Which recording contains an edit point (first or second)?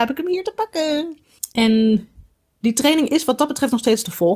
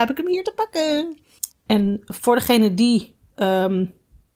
second